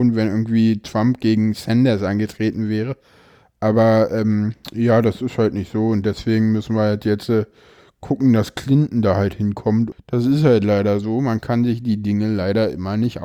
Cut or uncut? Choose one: cut